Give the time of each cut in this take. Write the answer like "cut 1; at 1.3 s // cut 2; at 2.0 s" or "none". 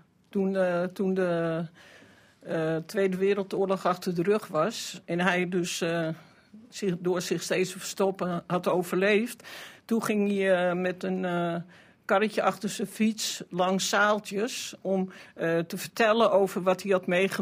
none